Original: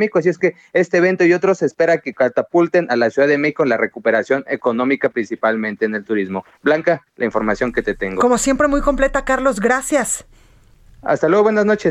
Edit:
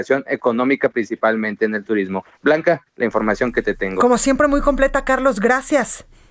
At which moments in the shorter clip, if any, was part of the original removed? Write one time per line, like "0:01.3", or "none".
none